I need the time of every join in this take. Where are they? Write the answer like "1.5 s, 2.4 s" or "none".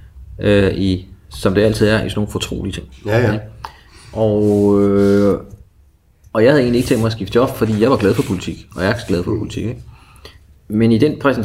none

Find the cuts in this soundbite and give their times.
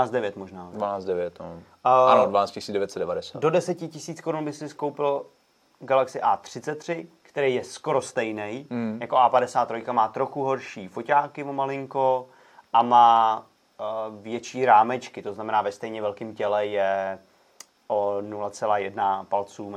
none

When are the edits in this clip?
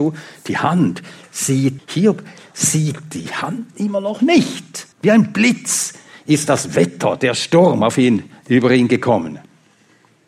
1.8 s, 4.9 s

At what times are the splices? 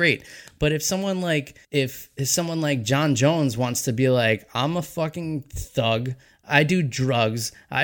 1.6 s

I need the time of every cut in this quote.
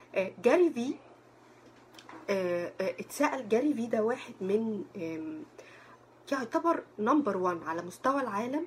none

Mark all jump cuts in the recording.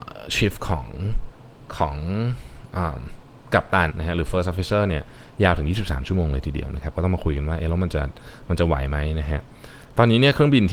3.9 s

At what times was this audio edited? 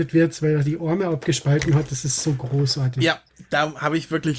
none

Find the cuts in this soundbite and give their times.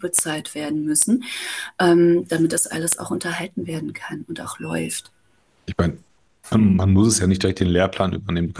none

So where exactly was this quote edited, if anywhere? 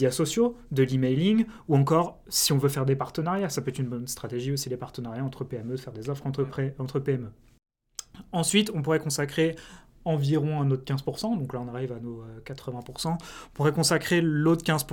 none

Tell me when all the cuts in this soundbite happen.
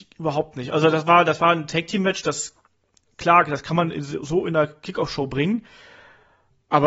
none

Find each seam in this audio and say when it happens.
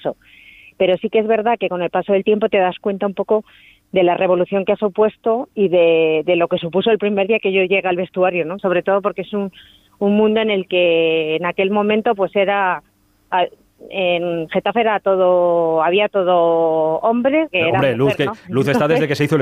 8.6 s, 17.5 s

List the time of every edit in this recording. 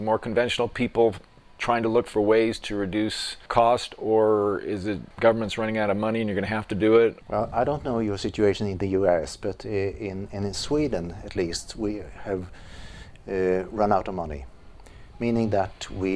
none

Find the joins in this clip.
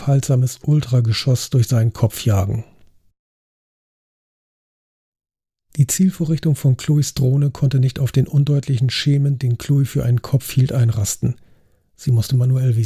none

